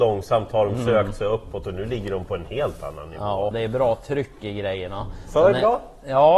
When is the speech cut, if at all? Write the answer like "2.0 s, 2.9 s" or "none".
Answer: 3.5 s